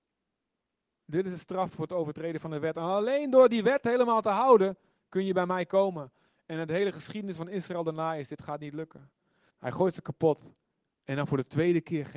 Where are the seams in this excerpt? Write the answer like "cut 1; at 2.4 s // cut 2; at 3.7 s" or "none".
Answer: cut 1; at 9.5 s // cut 2; at 10.8 s